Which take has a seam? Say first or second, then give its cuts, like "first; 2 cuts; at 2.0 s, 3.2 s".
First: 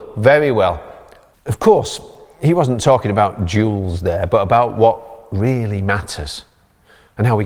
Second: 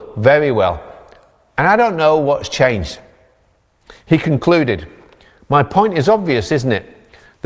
first; 1 cut; at 1.3 s